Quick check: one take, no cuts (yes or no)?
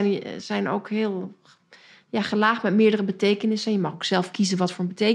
yes